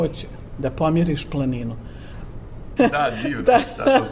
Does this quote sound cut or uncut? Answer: cut